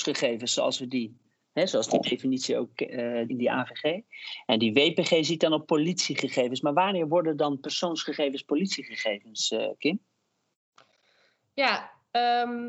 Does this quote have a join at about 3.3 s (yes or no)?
yes